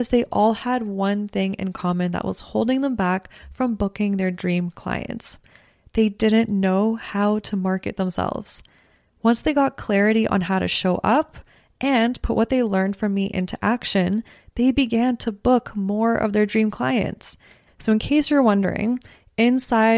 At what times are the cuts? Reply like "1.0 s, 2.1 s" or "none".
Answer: 17.7 s